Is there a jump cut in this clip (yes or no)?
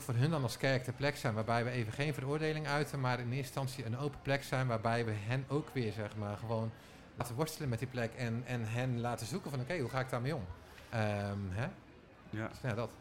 no